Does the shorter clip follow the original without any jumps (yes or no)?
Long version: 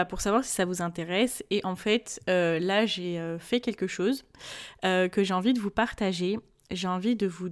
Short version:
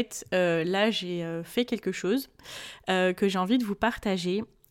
yes